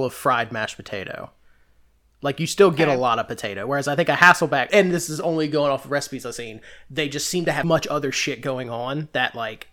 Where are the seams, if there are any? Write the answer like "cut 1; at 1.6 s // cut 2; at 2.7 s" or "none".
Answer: cut 1; at 4.7 s // cut 2; at 7.6 s